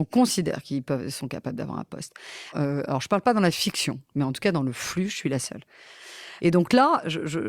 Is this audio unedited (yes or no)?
no